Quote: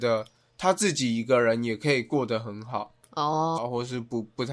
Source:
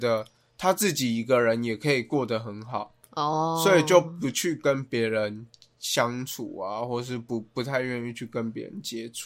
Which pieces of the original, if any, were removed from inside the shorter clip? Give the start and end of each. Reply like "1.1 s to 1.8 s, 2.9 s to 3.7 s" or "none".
3.6 s to 6.7 s